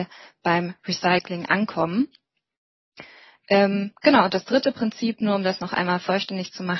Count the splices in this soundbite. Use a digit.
0